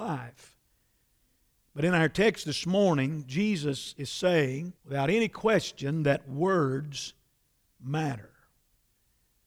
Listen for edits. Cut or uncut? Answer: cut